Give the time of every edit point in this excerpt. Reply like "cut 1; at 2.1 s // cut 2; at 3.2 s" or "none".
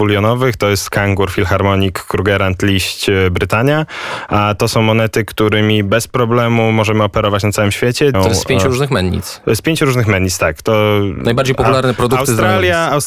cut 1; at 8.1 s